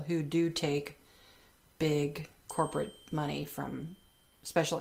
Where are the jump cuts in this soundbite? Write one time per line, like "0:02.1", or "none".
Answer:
none

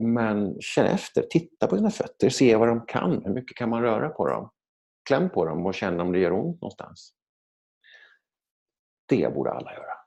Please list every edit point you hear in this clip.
none

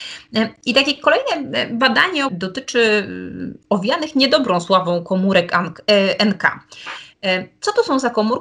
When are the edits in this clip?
0:02.3

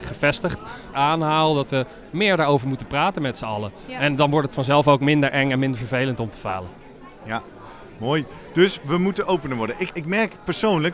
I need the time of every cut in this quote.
0:00.9
0:09.9

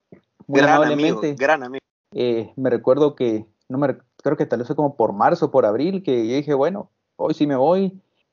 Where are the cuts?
0:02.0

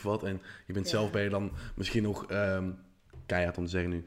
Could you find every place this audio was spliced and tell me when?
none

